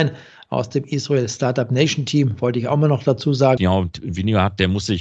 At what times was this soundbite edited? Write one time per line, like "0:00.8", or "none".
0:03.6